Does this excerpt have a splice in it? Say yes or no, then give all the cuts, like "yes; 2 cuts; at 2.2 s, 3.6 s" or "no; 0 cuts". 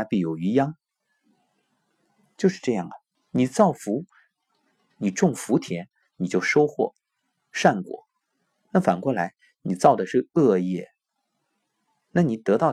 yes; 1 cut; at 3.1 s